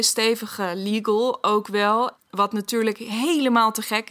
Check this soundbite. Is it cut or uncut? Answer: cut